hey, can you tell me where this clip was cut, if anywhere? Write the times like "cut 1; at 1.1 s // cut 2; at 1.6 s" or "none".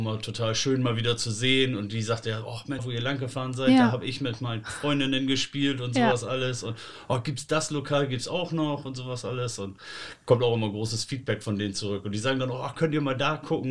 cut 1; at 2.8 s